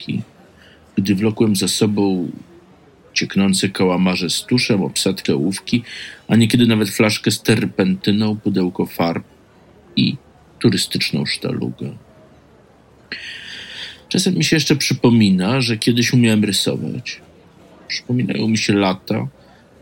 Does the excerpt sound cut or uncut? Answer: cut